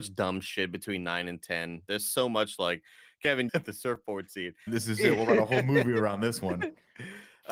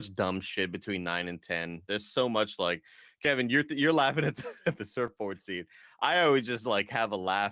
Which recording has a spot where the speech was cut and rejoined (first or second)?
first